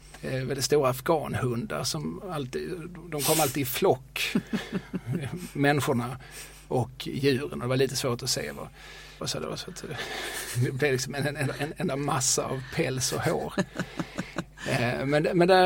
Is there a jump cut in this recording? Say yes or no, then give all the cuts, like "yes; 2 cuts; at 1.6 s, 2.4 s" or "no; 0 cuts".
yes; 2 cuts; at 9.2 s, 12.5 s